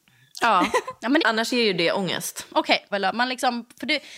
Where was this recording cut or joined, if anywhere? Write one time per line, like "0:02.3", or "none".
0:01.2
0:02.9